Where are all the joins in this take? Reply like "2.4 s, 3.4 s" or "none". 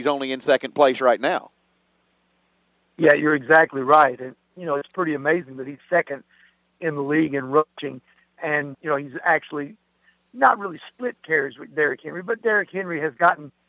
8.7 s